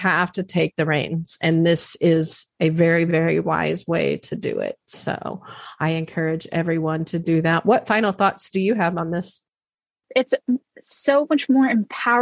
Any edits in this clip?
no; 0 cuts

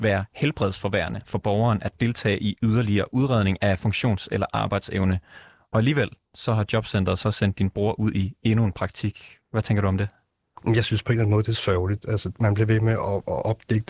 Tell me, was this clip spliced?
no; 0 cuts

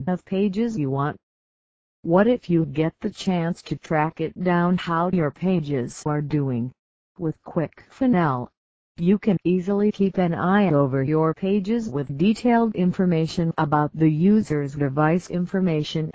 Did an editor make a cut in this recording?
yes; 2 cuts; at 7.1 s, 12.1 s

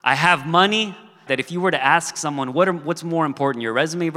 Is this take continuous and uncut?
no; 1 cut; at 1.3 s

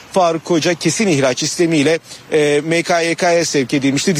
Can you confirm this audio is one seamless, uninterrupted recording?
yes; 0 cuts

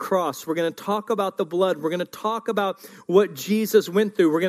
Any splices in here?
no; 0 cuts

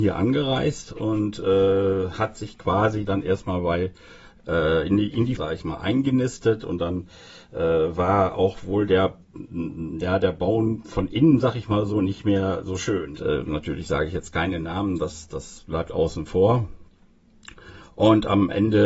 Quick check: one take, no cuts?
no; 2 cuts; at 5.4 s, 13.2 s

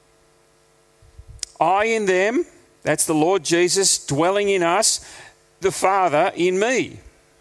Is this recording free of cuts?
no; 1 cut; at 5.6 s

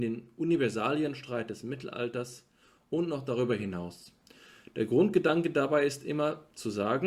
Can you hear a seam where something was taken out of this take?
no; 0 cuts

